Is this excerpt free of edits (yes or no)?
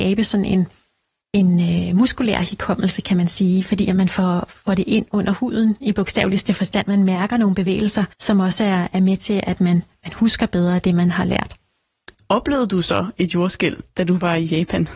no